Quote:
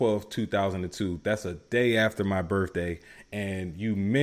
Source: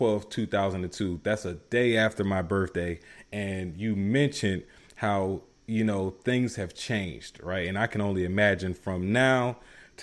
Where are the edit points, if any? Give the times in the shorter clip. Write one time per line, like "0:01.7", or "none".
none